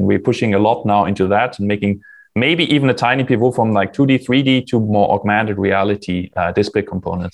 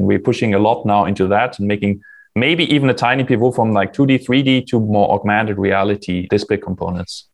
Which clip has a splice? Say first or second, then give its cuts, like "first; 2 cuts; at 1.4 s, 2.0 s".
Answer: second; 1 cut; at 6.3 s